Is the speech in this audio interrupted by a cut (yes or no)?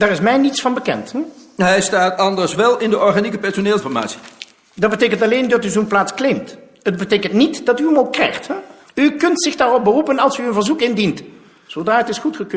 yes